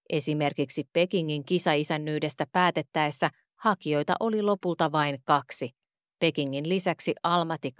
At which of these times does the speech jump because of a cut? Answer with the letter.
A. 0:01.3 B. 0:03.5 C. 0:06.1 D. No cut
D